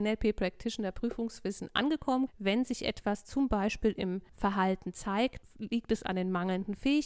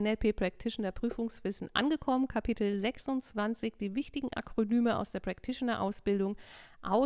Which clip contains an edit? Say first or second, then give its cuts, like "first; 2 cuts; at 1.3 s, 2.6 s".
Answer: first; 3 cuts; at 2.3 s, 4.3 s, 5.4 s